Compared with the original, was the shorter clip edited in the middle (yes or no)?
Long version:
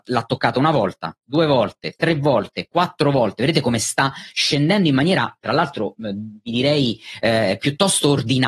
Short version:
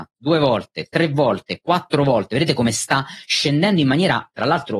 no